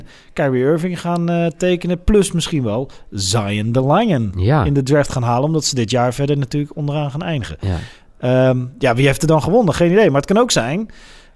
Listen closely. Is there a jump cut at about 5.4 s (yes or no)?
no